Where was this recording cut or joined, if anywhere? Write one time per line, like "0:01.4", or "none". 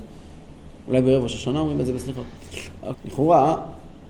0:02.9